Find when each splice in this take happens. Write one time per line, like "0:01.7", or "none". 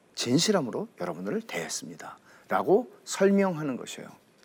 none